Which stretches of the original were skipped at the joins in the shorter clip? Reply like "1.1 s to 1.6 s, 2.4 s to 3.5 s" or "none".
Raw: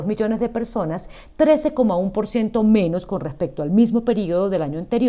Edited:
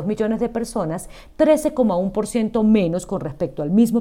none

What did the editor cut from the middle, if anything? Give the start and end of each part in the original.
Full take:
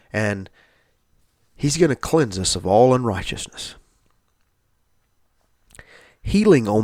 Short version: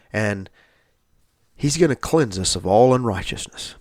none

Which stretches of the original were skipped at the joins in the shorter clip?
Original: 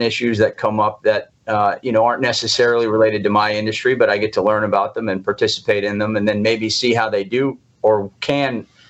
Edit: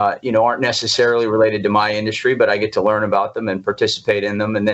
none

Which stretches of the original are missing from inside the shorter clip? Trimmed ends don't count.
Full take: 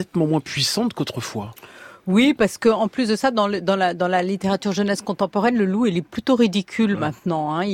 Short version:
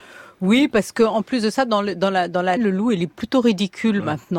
4.2 s to 5.5 s

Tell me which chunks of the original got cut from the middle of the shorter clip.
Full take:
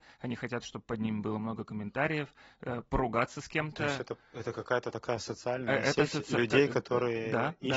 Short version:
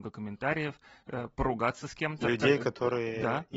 3.7 s to 6.3 s

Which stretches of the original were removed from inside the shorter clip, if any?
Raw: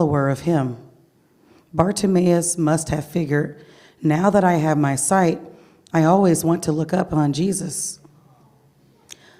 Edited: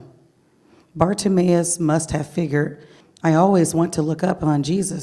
3.8 s to 5.7 s

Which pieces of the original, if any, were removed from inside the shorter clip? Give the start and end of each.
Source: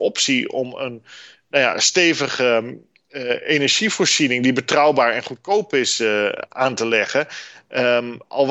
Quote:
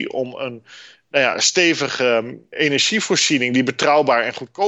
2.9 s to 3.4 s

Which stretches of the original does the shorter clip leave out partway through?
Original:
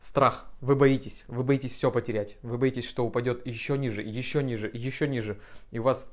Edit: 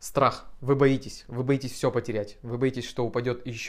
none

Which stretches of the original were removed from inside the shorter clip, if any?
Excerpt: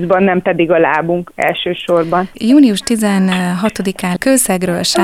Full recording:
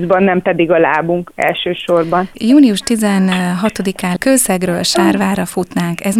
none

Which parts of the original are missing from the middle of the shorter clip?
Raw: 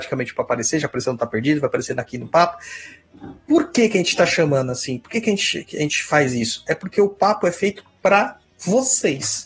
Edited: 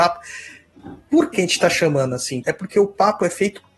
3.7 s to 3.9 s, 5.0 s to 6.6 s

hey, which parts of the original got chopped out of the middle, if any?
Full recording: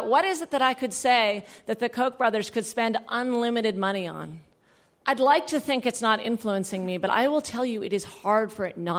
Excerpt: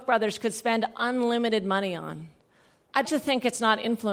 5.2 s to 5.5 s

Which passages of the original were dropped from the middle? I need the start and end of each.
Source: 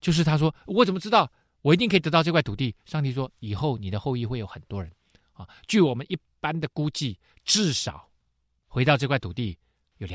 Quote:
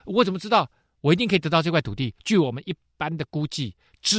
2.8 s to 5.6 s

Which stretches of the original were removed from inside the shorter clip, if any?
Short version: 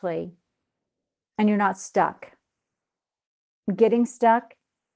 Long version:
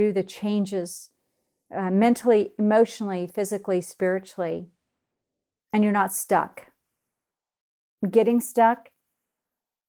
none

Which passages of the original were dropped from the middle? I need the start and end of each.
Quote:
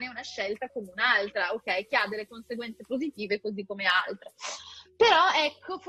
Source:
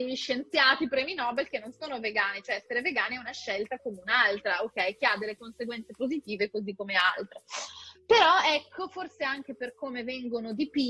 none

